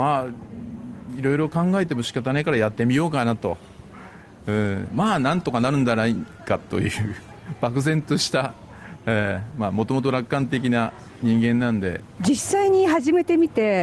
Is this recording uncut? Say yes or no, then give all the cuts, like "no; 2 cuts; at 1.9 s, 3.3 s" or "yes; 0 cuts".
no; 1 cut; at 12.2 s